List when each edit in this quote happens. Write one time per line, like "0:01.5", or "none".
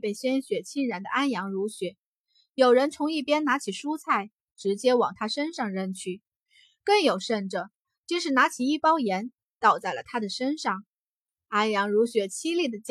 none